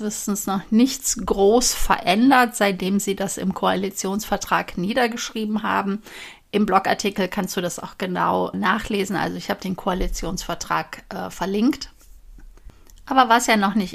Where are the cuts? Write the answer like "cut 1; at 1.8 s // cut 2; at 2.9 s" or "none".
cut 1; at 8.5 s